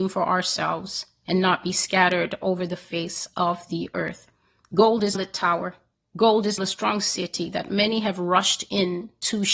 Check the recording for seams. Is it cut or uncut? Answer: cut